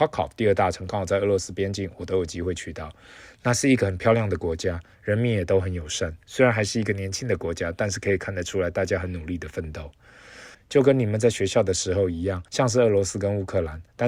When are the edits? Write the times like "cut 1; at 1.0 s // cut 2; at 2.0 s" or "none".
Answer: cut 1; at 10.5 s // cut 2; at 12.5 s